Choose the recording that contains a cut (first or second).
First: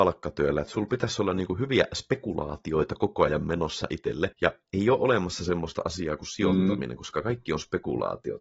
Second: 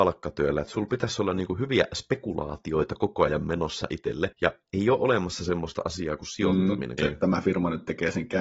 second